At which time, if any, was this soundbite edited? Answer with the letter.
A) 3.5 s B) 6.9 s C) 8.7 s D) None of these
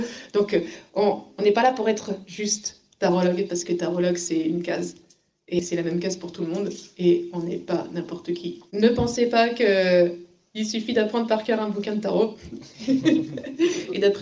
C